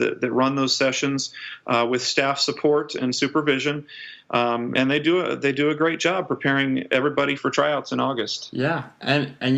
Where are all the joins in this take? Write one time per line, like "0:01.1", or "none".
0:07.4

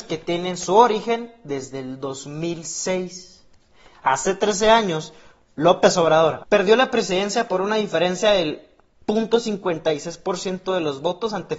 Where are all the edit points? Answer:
0:06.4

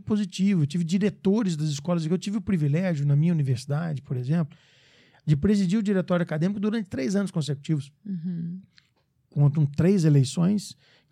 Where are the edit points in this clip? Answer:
none

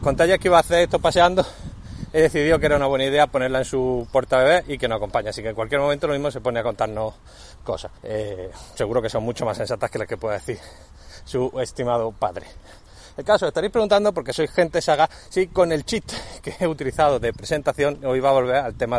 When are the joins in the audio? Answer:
0:08.0

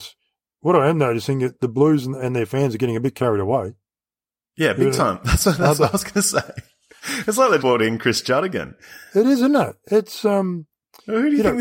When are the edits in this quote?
0:07.6

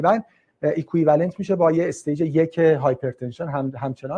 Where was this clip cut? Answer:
none

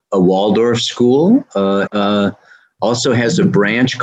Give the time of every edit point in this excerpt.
0:01.9

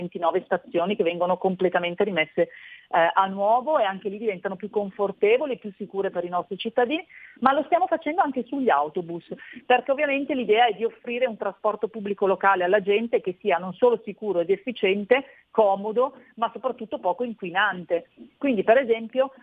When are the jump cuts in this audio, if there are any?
none

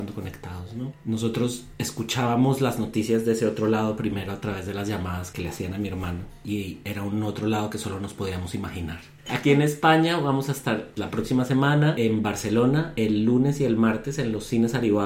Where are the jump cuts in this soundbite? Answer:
0:09.2

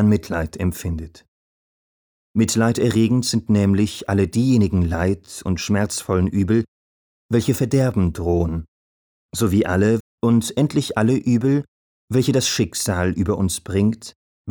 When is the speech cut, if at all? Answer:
0:02.2
0:10.0

